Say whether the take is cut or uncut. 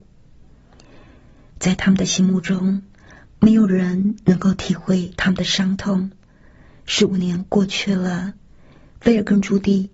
uncut